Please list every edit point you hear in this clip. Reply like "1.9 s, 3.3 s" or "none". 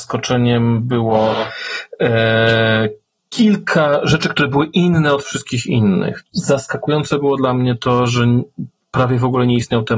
6.2 s